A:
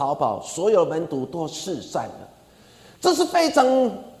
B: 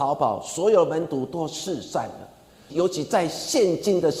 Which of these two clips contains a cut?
B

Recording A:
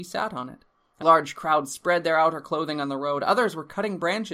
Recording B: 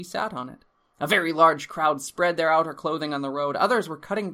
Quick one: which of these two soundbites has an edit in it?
A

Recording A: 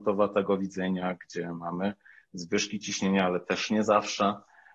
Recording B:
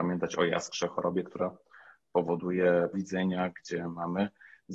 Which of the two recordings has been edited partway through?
B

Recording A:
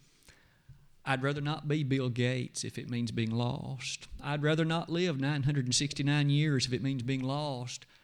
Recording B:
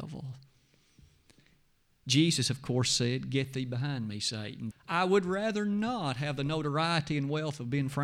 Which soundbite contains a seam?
B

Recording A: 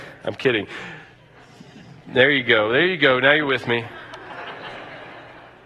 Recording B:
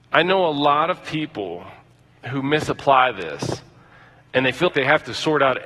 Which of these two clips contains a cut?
B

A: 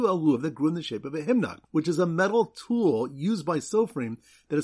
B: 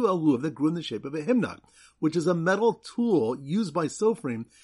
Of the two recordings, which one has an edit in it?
A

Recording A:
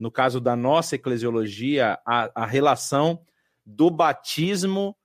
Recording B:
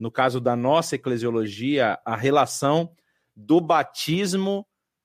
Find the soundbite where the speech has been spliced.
B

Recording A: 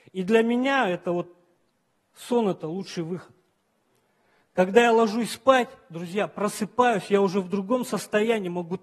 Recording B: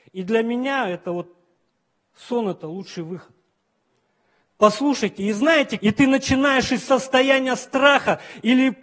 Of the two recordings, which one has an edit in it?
B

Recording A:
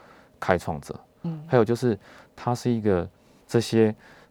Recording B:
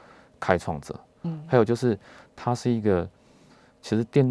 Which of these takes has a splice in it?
A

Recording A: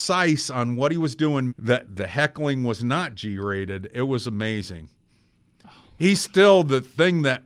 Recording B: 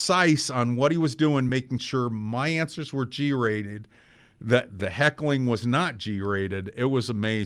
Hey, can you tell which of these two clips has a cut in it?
A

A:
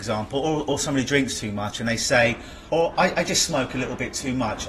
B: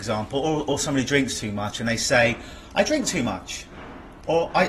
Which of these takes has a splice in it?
A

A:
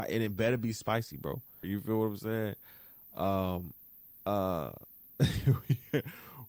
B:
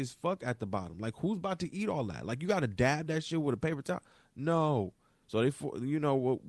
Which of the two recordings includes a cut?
A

